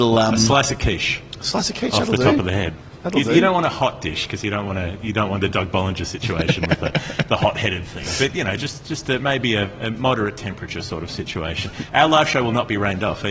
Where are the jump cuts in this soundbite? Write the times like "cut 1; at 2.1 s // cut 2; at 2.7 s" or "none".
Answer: none